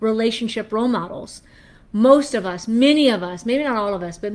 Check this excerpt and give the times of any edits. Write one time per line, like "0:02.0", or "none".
none